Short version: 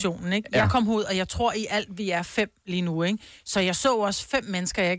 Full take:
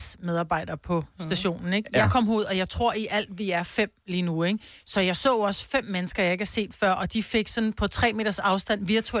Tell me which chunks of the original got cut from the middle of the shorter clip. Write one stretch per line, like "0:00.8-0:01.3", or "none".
none